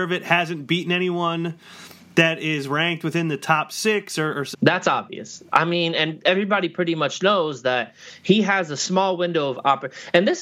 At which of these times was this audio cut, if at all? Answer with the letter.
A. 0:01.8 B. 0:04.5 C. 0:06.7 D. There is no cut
B